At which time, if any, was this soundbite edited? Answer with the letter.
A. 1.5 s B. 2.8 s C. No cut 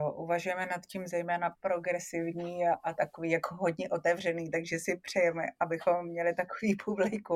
A